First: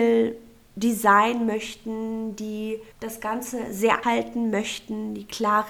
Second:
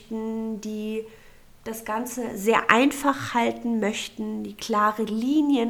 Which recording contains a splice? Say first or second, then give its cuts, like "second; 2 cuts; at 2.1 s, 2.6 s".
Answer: first; 2 cuts; at 2.9 s, 4.0 s